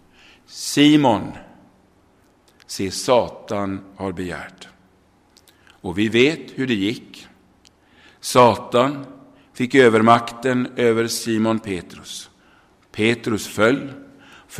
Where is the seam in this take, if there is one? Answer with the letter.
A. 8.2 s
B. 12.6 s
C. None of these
C